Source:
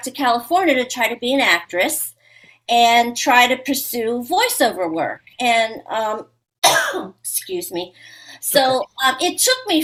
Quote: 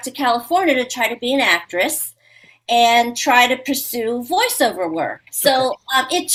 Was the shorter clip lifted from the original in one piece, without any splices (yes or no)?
no